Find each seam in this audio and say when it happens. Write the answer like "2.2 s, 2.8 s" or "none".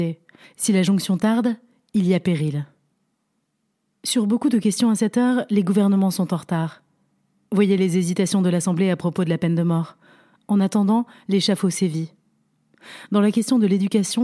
none